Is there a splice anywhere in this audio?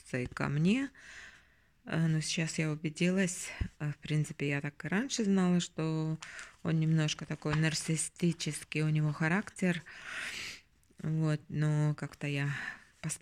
no; 0 cuts

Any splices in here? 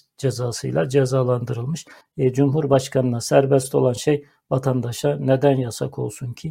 yes; 1 cut; at 2.0 s

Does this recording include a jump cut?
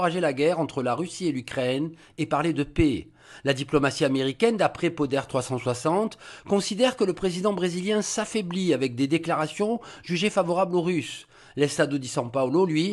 no; 0 cuts

